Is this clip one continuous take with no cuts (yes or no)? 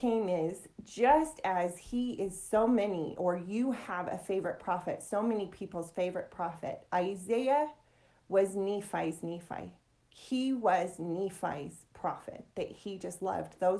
yes